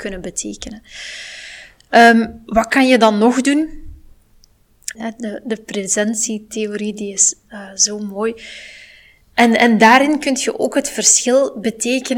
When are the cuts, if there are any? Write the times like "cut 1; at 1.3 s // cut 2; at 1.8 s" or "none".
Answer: cut 1; at 4.9 s